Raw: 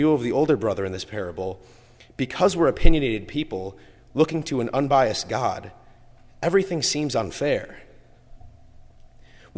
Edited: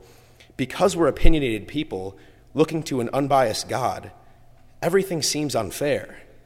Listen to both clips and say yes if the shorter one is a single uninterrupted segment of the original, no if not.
yes